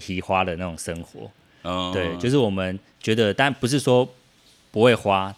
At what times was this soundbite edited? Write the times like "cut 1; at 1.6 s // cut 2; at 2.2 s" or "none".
none